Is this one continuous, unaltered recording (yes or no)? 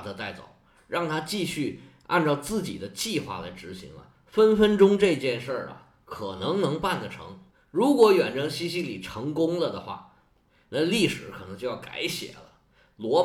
yes